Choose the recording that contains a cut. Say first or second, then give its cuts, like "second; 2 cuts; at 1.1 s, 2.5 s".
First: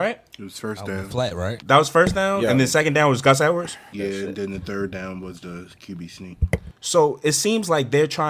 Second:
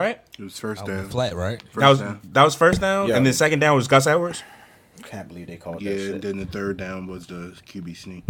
first; 2 cuts; at 1.6 s, 3.9 s